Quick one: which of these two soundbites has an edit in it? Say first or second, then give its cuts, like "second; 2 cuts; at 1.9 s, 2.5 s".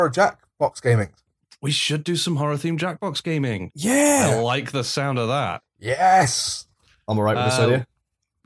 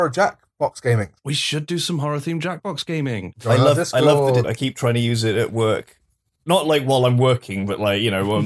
second; 3 cuts; at 1.2 s, 3.3 s, 4.4 s